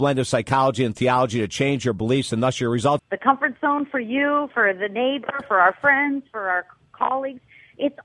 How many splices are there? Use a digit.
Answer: 2